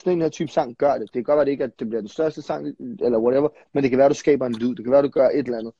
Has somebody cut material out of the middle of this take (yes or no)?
no